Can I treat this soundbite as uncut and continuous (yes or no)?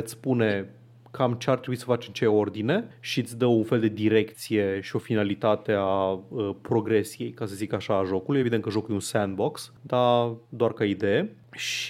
yes